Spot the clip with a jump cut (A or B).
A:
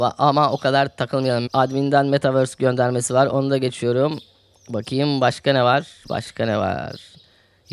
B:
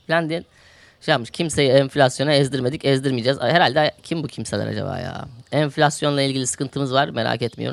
A